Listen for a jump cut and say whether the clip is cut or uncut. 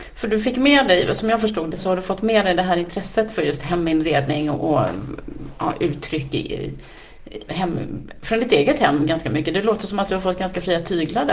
cut